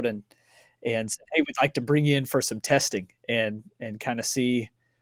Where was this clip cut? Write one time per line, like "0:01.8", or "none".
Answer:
none